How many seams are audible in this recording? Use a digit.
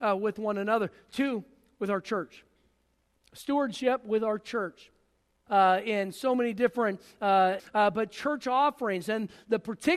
2